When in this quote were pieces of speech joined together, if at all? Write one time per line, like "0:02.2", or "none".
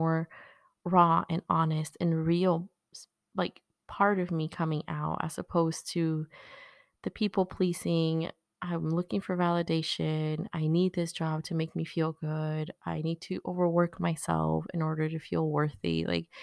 none

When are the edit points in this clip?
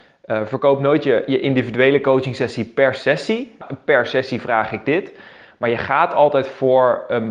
0:03.6

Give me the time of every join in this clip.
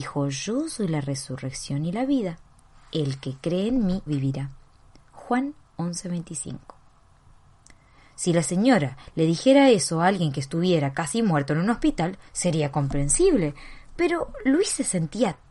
0:04.1

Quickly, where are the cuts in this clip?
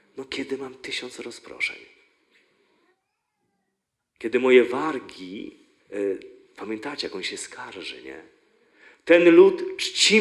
0:05.8

